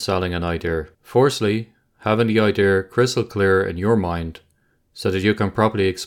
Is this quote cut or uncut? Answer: cut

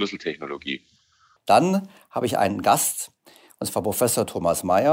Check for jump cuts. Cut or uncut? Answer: cut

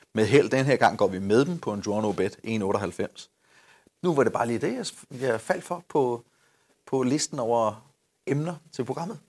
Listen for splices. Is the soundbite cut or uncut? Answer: cut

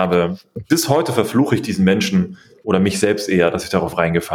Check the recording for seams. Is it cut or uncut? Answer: uncut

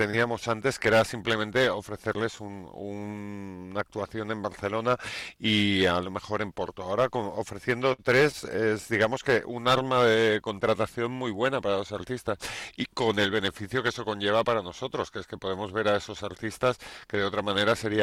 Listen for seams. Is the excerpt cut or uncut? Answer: uncut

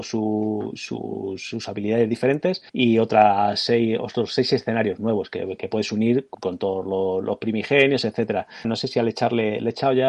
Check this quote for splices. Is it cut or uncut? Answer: cut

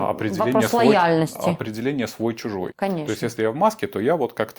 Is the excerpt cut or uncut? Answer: cut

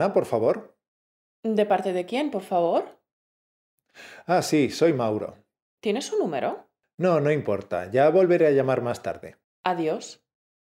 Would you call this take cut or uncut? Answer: cut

